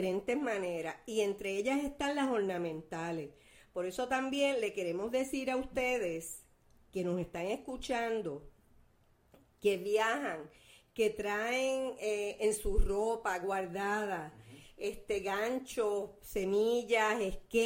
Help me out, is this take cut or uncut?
uncut